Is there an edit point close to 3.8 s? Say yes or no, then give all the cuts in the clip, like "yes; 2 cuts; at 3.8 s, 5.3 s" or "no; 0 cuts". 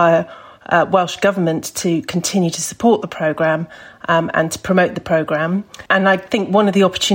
no; 1 cut; at 5.9 s